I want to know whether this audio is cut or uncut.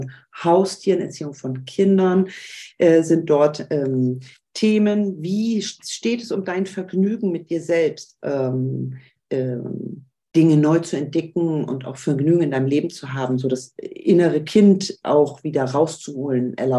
cut